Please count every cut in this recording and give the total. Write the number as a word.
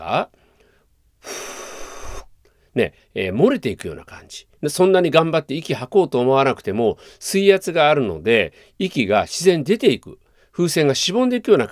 two